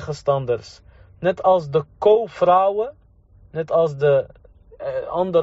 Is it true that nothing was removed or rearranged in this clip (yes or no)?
yes